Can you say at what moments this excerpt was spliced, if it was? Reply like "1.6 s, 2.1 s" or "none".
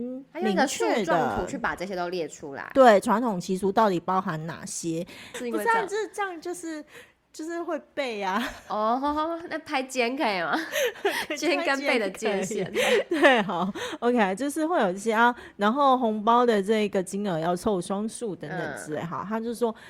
5.3 s